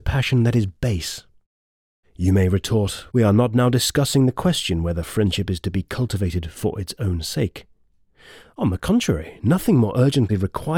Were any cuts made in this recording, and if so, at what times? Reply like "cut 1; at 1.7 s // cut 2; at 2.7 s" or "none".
none

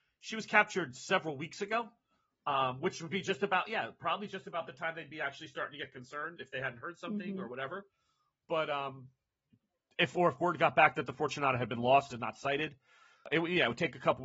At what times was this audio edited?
none

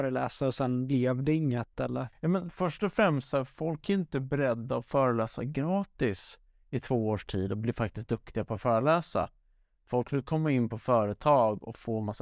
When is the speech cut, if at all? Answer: none

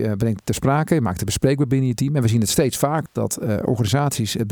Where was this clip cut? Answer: cut 1; at 3.1 s

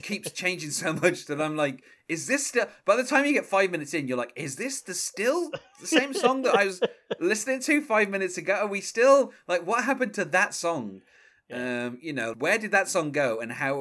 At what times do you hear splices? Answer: cut 1; at 12.3 s

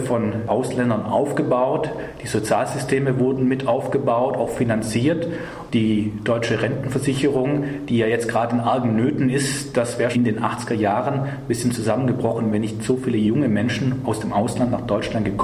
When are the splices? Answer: cut 1; at 10.1 s

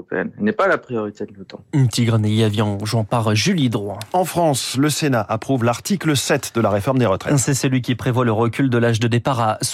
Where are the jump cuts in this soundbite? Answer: none

